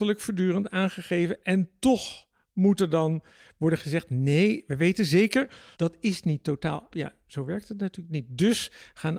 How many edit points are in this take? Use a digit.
2